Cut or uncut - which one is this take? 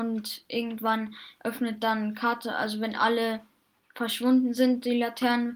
uncut